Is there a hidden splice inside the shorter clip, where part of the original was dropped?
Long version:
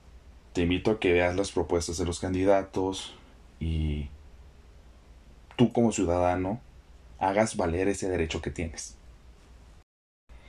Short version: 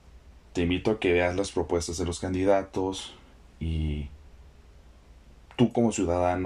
no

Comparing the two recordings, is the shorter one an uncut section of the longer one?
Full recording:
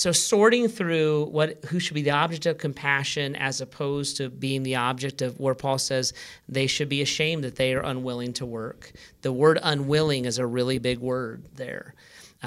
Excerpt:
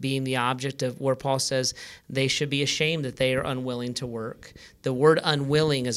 yes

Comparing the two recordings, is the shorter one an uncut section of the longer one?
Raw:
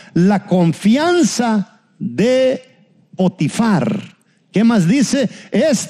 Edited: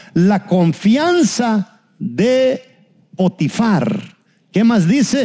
yes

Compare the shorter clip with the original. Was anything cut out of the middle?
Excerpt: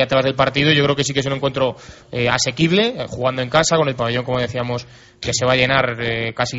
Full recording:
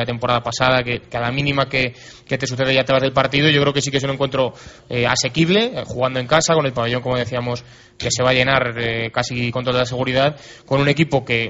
no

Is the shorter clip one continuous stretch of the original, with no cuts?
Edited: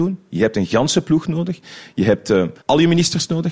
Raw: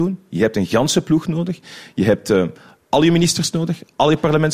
no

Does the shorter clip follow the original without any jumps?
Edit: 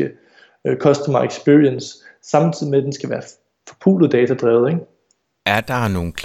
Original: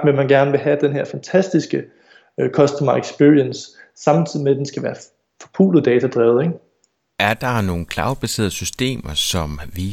yes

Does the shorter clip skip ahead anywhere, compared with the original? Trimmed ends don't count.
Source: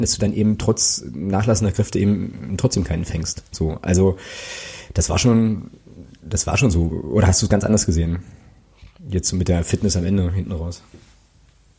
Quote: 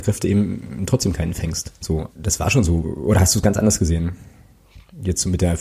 yes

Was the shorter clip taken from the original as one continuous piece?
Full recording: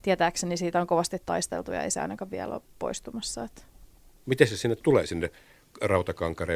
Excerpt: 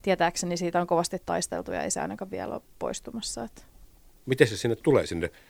yes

